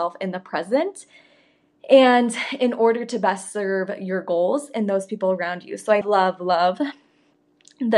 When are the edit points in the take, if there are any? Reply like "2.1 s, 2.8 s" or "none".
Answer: 6.0 s